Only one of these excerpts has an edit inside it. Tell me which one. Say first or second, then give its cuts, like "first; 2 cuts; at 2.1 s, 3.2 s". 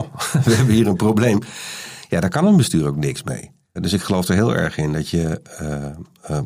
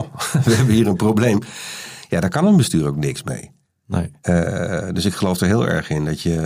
first; 1 cut; at 3.8 s